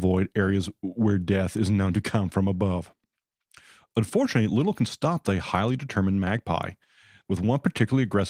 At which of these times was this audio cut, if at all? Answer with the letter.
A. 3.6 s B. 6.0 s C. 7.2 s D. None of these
C